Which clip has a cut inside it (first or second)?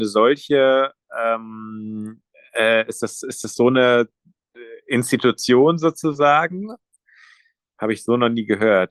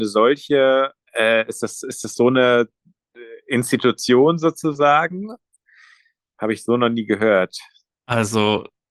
second